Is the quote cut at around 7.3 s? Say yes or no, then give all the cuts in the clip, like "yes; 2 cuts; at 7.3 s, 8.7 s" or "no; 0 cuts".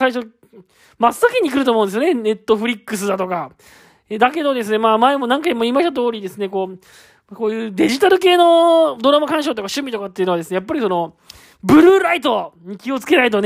no; 0 cuts